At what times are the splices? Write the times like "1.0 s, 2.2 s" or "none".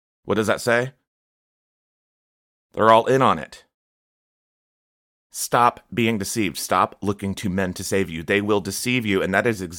none